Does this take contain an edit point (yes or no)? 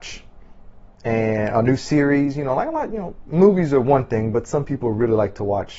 no